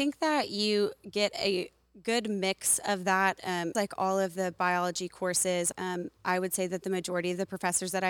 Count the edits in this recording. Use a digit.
2